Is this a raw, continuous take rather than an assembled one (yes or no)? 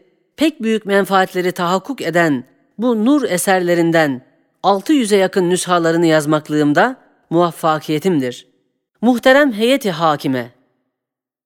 no